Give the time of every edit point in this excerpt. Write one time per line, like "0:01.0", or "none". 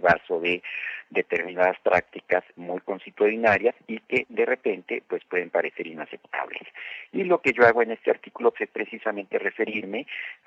0:07.1
0:08.5

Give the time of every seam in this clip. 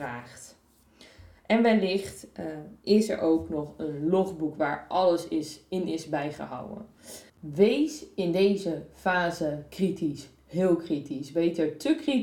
0:07.3

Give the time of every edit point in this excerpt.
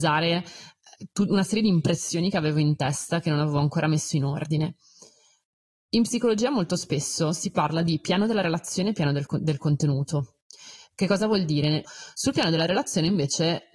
0:11.8

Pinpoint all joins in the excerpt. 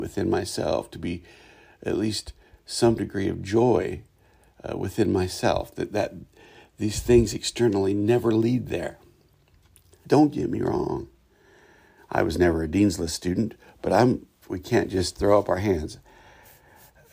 0:10.0
0:12.0
0:14.4

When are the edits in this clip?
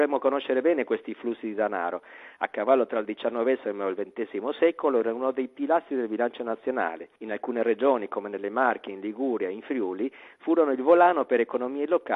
0:07.2

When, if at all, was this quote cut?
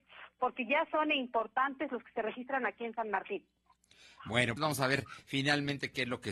0:04.6

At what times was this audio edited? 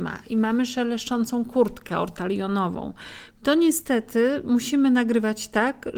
0:03.3

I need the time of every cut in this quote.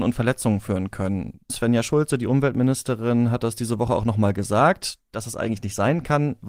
0:01.5

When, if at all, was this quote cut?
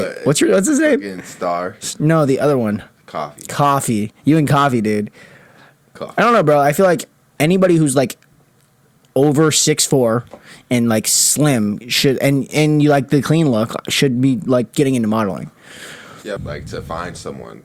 0:16.4

